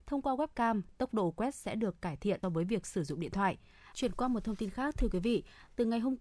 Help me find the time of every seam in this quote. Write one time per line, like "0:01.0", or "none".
0:02.4
0:03.9